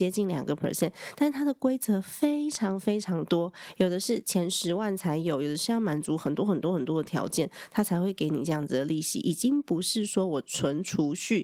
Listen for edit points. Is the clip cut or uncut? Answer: uncut